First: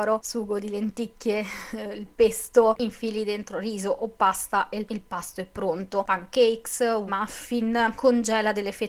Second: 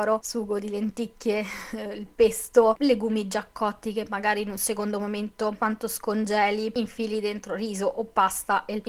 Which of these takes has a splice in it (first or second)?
first